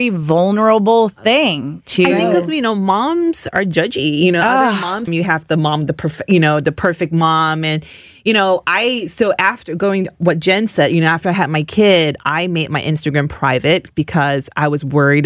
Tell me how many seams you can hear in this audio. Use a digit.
1